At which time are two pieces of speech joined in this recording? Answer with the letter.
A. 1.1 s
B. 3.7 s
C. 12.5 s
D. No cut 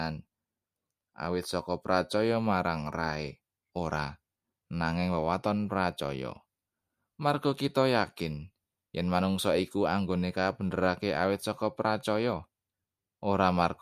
B